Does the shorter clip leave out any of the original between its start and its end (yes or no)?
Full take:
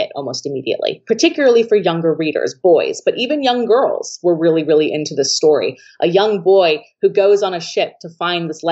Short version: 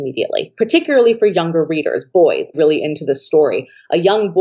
yes